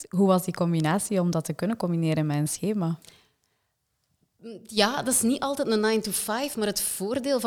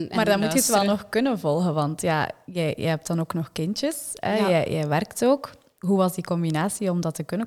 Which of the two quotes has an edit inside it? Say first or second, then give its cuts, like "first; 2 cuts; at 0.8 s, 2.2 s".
second; 1 cut; at 5.8 s